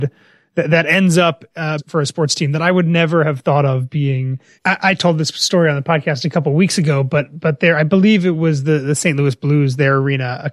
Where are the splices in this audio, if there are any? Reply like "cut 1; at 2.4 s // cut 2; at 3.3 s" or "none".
cut 1; at 1.8 s // cut 2; at 4.5 s